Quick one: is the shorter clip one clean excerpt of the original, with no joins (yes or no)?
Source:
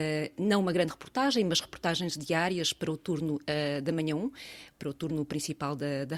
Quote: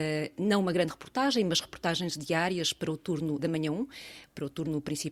no